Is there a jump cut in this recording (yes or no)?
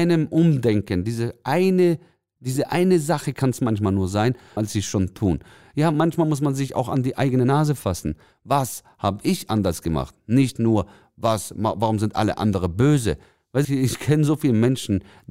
yes